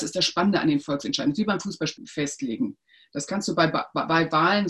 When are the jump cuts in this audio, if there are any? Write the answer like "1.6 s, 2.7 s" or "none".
2.0 s